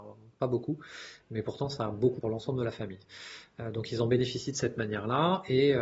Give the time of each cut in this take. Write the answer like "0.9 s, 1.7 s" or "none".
2.2 s